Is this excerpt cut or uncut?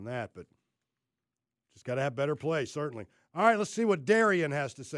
uncut